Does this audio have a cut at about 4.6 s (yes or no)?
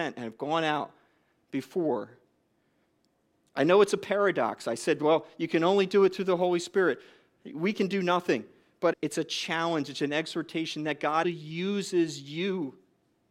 no